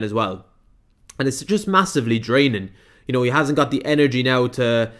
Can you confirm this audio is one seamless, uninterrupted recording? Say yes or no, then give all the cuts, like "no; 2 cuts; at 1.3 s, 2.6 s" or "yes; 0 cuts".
yes; 0 cuts